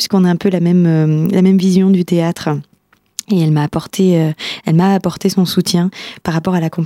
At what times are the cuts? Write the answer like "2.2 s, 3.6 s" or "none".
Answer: none